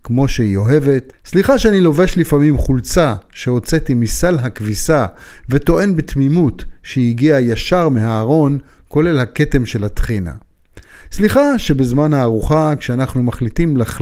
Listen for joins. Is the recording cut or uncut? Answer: uncut